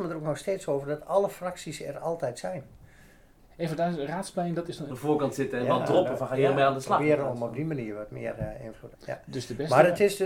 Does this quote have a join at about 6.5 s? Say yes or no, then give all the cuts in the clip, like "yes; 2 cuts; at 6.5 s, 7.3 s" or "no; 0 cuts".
no; 2 cuts; at 4.9 s, 8.9 s